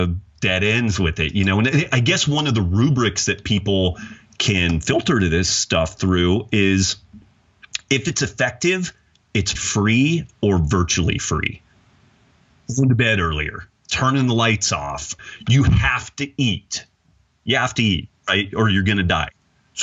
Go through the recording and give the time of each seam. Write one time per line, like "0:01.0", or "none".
0:09.5

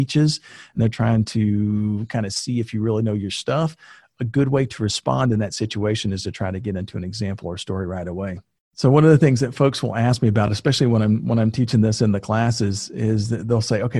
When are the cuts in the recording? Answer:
none

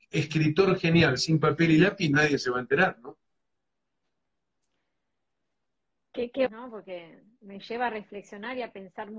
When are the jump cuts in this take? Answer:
0:06.5

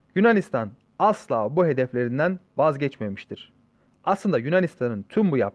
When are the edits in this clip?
0:03.8

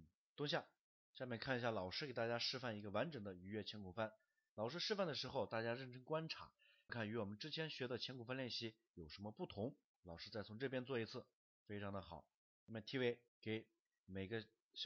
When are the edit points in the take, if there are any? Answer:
0:06.9
0:09.9
0:13.3

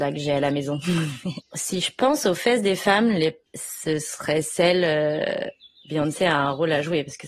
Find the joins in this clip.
0:01.4
0:03.5

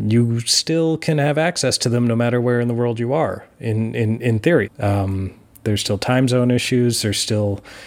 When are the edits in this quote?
0:04.7

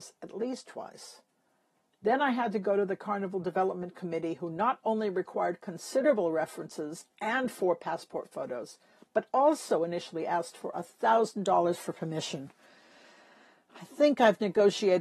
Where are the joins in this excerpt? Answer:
none

